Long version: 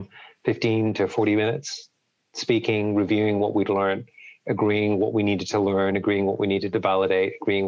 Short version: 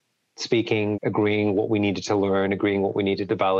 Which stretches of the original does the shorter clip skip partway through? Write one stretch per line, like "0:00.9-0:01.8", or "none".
0:02.9-0:04.4

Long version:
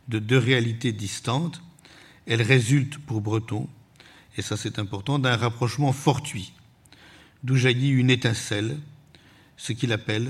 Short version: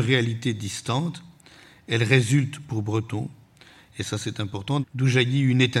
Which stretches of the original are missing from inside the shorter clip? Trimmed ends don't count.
0:05.2-0:07.3

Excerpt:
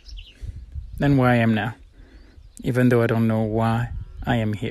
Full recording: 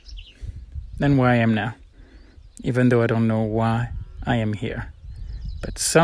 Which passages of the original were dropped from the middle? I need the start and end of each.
none

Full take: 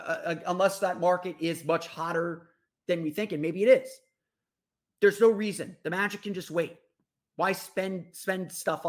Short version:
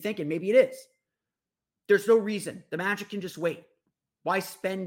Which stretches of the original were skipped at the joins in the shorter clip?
none

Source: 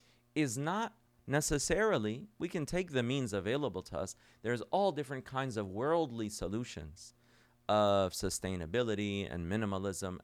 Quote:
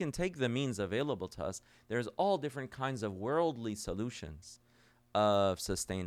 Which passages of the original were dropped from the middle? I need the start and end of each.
none

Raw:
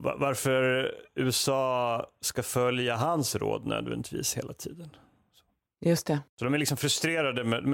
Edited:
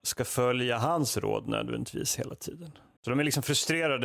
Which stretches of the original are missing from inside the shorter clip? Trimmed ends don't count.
0:05.1-0:06.3

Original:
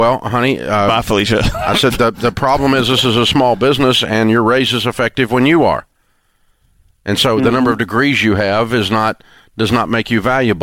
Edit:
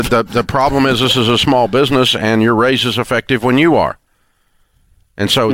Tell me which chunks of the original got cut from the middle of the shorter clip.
none

